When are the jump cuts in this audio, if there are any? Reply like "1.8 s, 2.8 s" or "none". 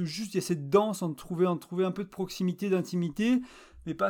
none